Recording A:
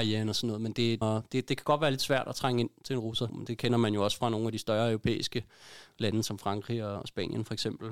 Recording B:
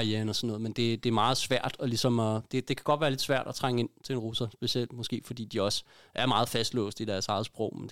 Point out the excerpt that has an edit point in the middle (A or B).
A